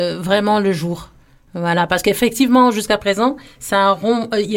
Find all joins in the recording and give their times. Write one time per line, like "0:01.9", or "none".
none